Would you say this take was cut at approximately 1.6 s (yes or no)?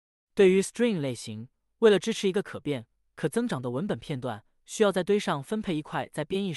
no